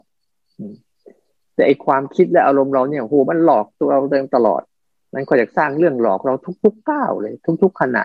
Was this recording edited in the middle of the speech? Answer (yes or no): no